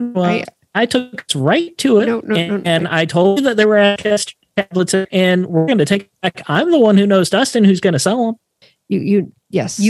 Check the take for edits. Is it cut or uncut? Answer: uncut